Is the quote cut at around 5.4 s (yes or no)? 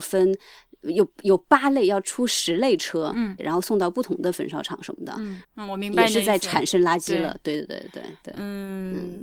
yes